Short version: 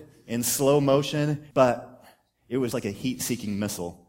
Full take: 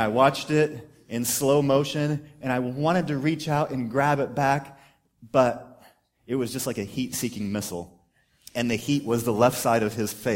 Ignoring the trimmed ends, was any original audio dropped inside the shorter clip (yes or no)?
yes